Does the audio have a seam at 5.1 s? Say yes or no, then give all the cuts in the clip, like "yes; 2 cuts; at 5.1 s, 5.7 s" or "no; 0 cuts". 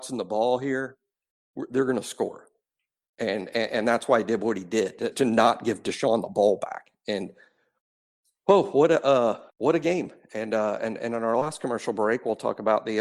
yes; 2 cuts; at 5.1 s, 9.5 s